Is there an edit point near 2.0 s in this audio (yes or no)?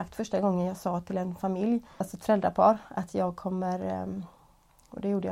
yes